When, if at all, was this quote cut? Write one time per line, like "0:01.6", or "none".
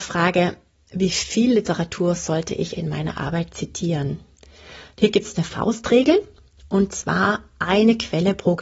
0:02.8